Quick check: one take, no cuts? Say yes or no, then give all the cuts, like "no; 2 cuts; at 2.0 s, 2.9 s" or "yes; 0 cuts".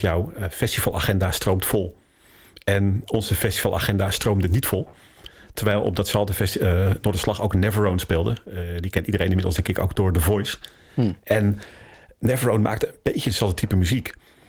yes; 0 cuts